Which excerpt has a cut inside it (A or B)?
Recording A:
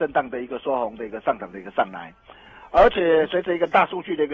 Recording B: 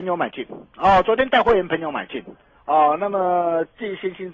B